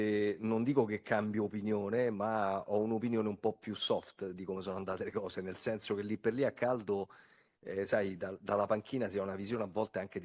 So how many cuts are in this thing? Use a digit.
0